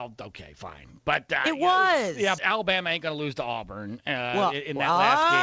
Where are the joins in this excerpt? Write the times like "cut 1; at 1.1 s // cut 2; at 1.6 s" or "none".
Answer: cut 1; at 2.4 s